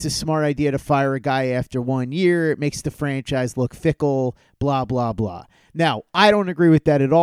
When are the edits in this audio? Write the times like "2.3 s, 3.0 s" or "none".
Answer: none